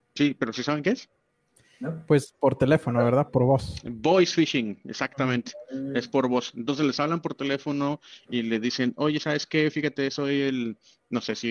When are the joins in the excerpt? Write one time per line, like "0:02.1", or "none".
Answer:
none